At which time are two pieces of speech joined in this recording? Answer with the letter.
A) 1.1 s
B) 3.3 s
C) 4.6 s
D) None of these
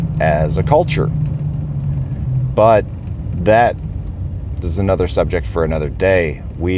C